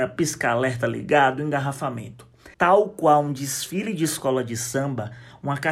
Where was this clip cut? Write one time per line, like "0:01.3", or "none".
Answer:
0:02.5